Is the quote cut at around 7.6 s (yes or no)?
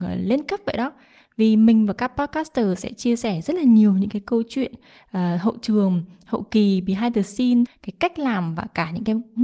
yes